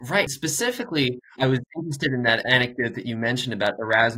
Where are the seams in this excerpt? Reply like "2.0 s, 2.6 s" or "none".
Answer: 1.4 s